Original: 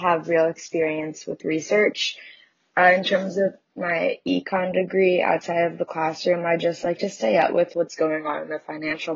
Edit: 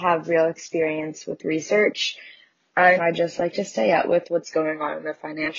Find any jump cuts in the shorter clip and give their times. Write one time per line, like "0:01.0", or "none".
0:03.0

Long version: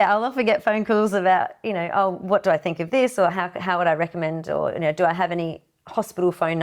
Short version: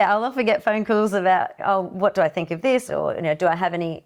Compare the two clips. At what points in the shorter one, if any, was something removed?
0:01.6
0:02.9

